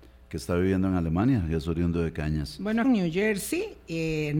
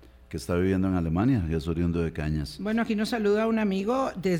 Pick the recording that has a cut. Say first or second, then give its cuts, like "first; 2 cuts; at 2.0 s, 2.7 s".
first; 1 cut; at 2.8 s